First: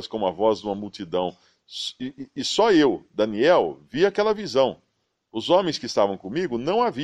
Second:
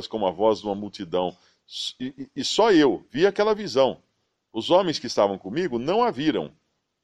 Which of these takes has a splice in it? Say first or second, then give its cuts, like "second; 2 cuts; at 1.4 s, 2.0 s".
second; 1 cut; at 3.1 s